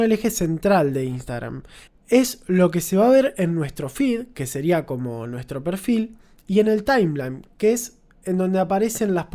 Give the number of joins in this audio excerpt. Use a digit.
1